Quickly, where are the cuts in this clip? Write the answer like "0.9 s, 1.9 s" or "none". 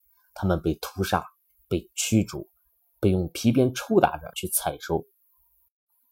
4.3 s